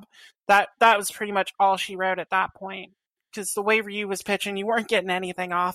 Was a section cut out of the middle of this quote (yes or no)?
no